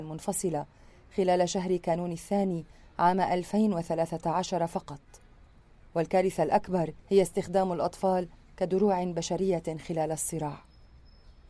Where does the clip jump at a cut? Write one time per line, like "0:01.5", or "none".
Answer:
0:07.0